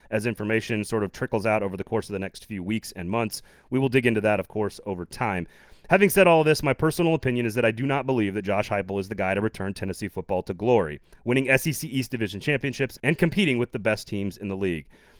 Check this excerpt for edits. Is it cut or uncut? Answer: uncut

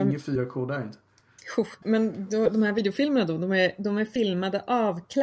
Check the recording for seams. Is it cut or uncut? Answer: cut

